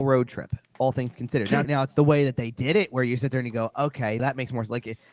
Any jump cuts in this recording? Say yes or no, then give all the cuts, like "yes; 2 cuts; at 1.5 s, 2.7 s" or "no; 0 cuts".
yes; 2 cuts; at 1.6 s, 4.2 s